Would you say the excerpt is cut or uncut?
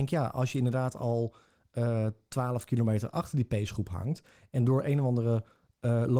uncut